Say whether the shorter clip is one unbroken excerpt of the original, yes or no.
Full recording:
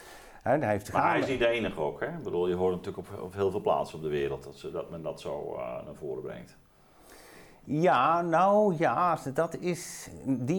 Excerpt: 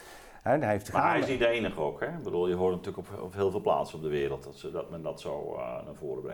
yes